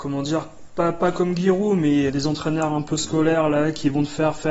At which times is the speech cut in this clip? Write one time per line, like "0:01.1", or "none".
0:02.1